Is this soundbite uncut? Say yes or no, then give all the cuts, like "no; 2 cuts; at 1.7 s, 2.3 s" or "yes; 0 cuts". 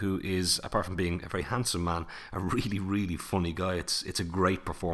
yes; 0 cuts